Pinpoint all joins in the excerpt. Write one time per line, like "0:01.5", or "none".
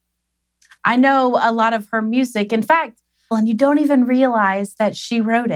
0:03.3

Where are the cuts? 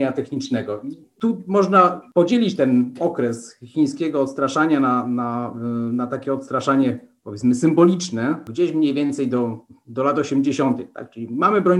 none

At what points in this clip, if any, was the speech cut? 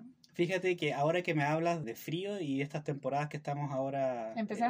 0:01.8

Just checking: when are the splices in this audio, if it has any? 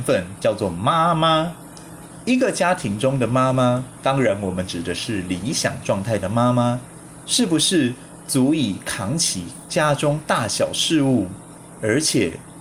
none

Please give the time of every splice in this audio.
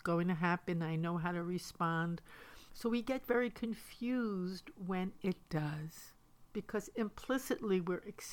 0:02.7

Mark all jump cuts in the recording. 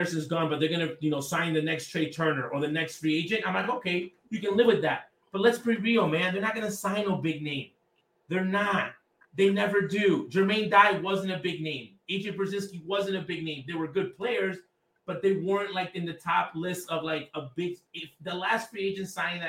none

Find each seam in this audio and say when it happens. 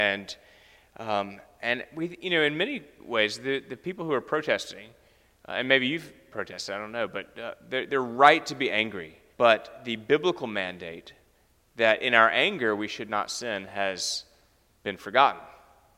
0:09.3

